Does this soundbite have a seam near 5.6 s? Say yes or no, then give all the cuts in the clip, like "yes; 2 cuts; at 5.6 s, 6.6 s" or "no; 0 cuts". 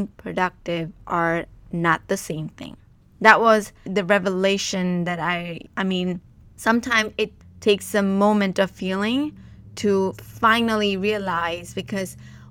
yes; 1 cut; at 5.6 s